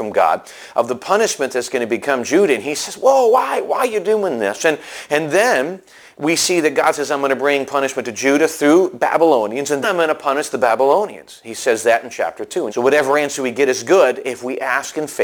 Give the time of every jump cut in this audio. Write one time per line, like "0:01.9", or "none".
0:09.8
0:12.7

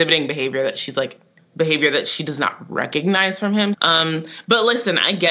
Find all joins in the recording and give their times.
0:03.7

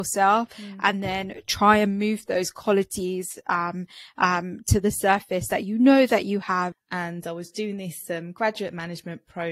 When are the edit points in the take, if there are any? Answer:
0:06.7

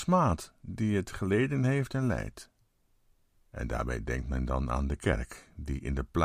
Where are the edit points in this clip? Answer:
0:03.3

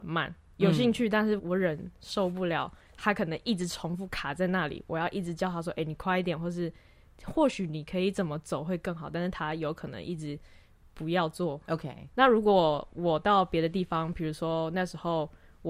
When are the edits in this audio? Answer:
0:01.4
0:12.1

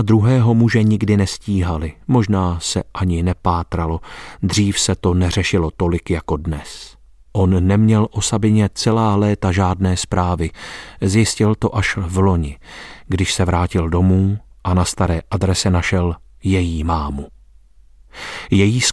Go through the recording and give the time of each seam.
none

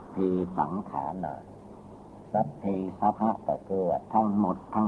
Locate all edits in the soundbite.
0:03.1

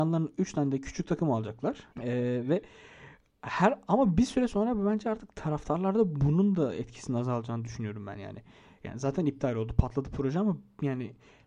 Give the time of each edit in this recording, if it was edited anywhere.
0:01.9

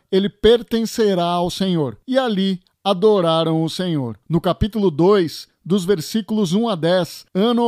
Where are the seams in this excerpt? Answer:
none

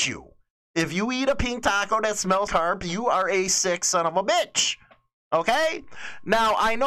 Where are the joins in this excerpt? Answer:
0:02.5

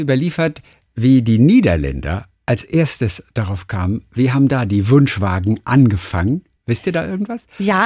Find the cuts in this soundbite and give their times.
none

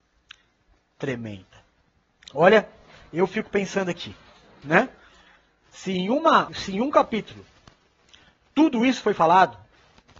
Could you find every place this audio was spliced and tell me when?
0:02.2
0:06.5

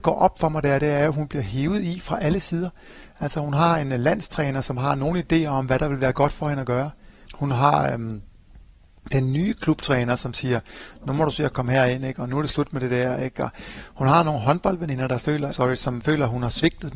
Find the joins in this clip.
0:07.2
0:15.5

